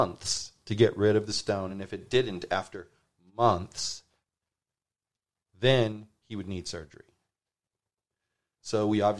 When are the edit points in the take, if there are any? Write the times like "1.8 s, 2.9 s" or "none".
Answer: none